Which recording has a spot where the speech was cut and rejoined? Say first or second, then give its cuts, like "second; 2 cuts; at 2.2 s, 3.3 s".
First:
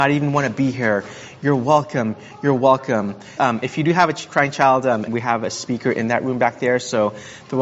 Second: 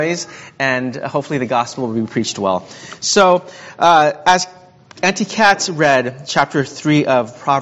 first; 2 cuts; at 3.4 s, 5.1 s